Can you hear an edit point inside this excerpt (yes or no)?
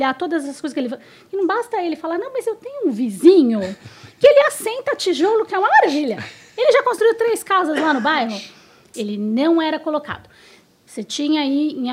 yes